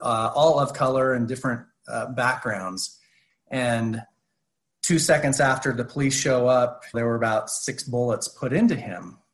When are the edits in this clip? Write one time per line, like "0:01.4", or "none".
0:03.3
0:06.9